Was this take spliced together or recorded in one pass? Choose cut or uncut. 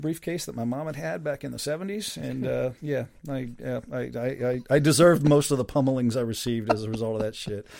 uncut